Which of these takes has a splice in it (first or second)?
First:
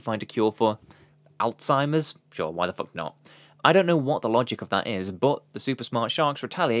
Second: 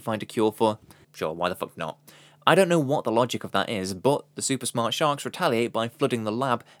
second